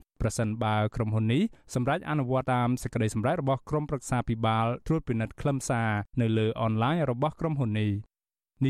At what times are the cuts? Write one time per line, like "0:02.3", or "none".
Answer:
0:02.4